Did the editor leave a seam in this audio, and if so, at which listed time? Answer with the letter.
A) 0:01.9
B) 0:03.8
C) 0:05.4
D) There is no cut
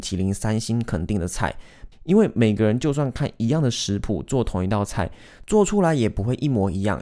A